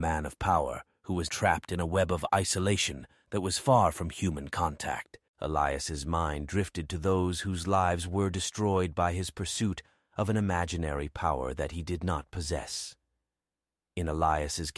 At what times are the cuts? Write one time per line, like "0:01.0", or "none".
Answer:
0:01.3
0:05.3